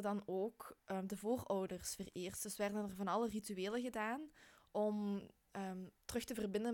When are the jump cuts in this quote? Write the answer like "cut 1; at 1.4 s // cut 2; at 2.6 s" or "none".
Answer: none

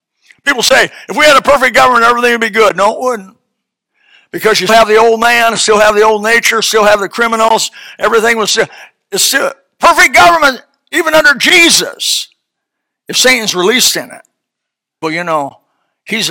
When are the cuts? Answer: cut 1; at 4.7 s // cut 2; at 15.0 s

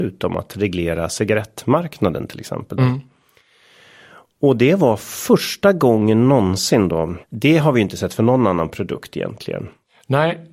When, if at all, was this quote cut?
cut 1; at 2.8 s // cut 2; at 7.2 s

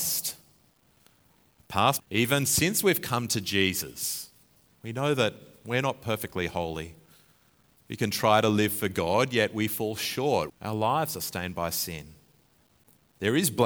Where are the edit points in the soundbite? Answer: cut 1; at 2.0 s // cut 2; at 10.5 s

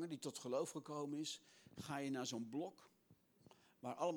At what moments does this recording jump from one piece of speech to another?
none

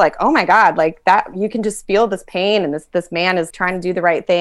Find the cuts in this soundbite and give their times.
cut 1; at 3.5 s

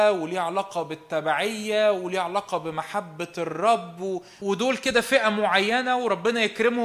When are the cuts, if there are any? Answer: cut 1; at 4.4 s

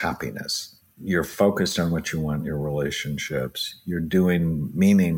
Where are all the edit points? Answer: none

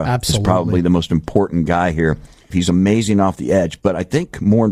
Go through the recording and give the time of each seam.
cut 1; at 2.5 s

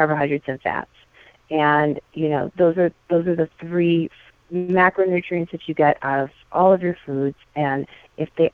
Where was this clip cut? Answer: none

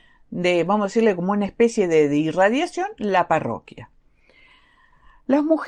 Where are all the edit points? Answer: none

